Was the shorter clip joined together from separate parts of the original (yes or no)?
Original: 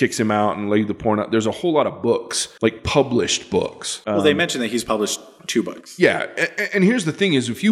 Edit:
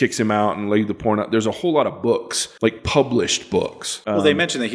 no